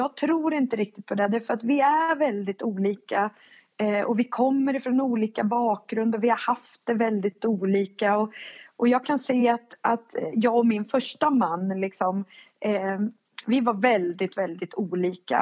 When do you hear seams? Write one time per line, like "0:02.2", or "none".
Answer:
none